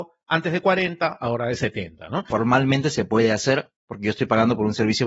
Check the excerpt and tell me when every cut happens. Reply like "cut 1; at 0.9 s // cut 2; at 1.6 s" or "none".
cut 1; at 2.3 s